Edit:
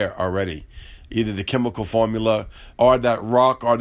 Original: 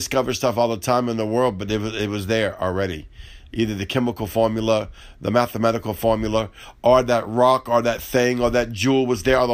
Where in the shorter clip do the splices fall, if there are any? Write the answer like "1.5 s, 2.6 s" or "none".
2.7 s